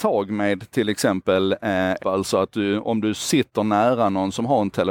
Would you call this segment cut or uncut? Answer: cut